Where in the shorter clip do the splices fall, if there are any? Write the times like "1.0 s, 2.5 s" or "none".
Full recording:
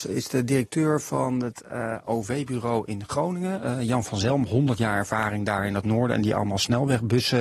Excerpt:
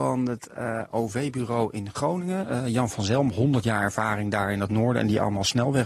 none